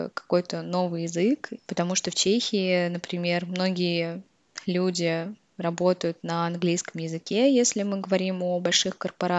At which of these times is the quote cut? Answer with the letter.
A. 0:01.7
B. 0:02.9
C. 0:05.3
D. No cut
A